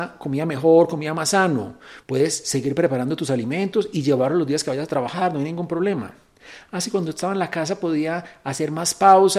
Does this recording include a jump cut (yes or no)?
yes